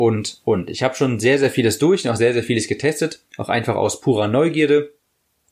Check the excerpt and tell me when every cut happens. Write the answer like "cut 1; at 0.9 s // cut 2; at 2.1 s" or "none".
none